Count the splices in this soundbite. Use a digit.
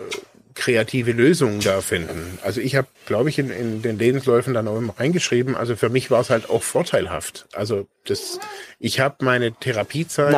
1